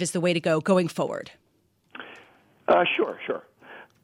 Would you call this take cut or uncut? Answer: uncut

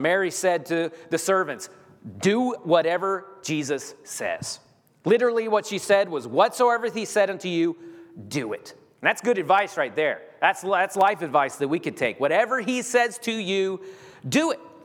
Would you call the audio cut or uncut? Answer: uncut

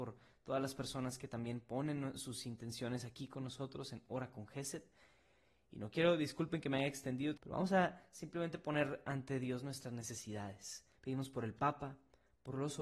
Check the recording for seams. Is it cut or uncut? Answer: cut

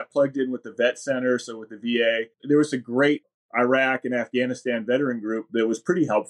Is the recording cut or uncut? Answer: cut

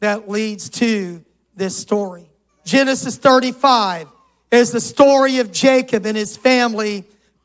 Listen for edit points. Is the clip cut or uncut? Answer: cut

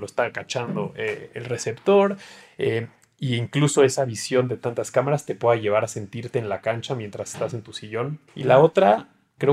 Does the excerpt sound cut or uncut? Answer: cut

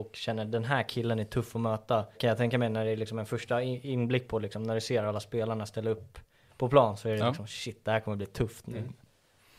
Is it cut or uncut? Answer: cut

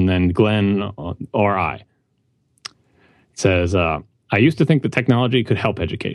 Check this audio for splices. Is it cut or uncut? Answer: uncut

